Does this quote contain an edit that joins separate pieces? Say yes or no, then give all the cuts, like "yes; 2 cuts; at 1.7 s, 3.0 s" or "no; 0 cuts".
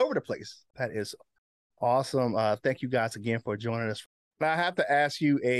no; 0 cuts